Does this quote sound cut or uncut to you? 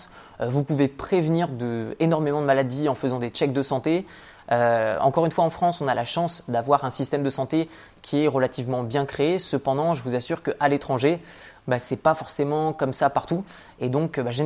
uncut